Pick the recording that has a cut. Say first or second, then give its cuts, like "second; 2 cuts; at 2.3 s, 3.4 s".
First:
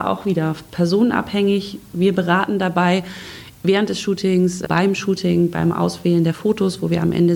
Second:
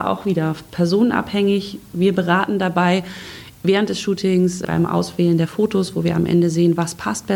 second; 1 cut; at 4.7 s